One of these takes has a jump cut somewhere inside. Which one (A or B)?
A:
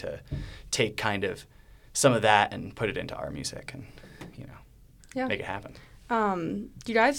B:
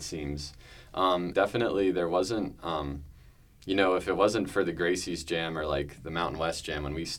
B